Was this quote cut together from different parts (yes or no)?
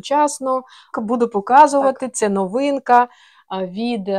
yes